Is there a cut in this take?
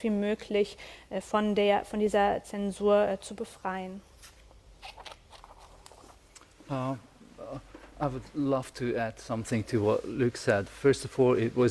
no; 0 cuts

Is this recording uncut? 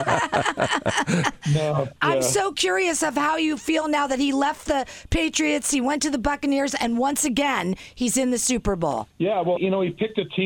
no; 1 cut; at 9.6 s

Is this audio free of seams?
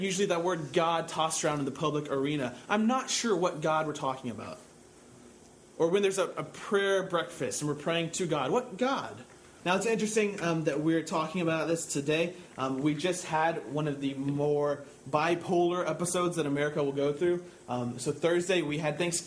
no; 1 cut; at 9.6 s

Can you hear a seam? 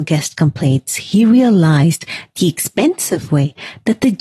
no; 0 cuts

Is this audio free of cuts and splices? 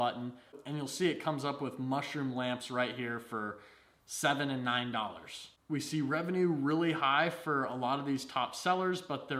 yes; 0 cuts

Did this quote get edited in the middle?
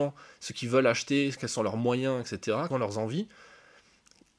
yes; 2 cuts; at 1.4 s, 2.7 s

